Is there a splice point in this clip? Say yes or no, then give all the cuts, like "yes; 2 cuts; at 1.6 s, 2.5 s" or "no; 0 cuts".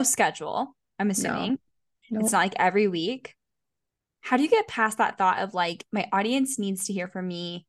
no; 0 cuts